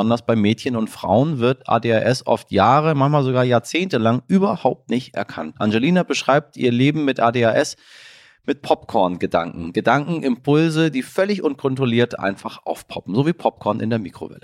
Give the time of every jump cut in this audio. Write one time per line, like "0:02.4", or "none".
none